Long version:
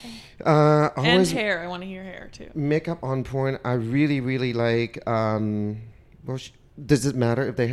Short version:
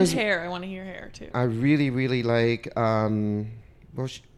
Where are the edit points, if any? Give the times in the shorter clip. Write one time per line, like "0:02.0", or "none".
0:01.3